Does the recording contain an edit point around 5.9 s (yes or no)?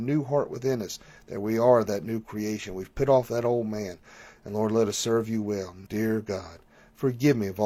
yes